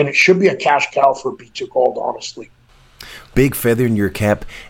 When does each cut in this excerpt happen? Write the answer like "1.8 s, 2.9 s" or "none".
3.3 s